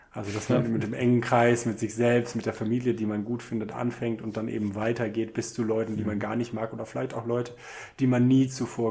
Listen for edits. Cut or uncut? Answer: uncut